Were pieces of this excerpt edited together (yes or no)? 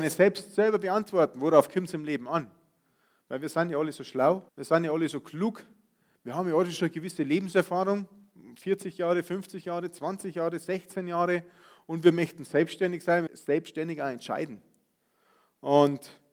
yes